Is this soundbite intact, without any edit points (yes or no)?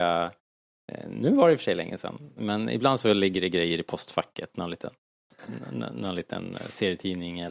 yes